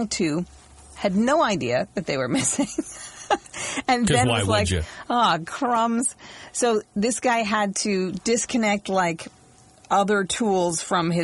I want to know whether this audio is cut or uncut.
uncut